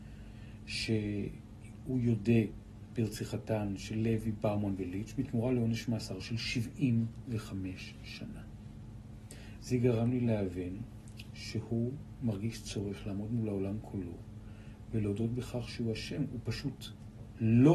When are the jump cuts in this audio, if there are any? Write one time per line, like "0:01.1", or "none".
0:09.6